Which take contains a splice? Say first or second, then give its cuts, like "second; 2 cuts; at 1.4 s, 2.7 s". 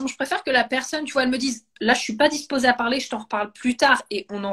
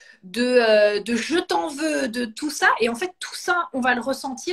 first; 1 cut; at 1.8 s